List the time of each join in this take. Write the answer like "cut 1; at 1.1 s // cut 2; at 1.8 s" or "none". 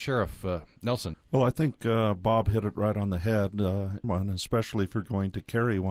cut 1; at 1.1 s // cut 2; at 4.0 s